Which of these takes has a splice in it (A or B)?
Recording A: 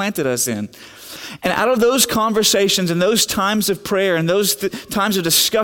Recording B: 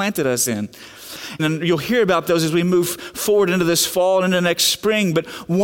B